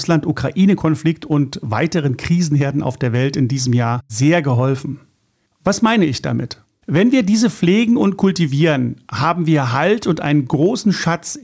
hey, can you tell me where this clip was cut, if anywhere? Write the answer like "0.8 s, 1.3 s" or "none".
5.4 s, 6.8 s